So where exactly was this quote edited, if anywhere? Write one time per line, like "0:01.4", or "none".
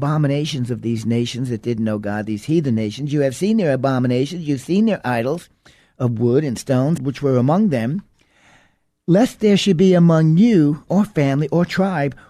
0:07.0
0:10.9